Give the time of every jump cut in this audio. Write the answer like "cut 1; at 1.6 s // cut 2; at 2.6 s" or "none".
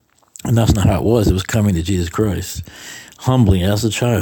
none